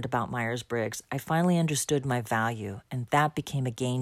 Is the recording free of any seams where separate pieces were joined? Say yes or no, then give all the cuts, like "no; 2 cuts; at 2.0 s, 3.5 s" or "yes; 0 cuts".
yes; 0 cuts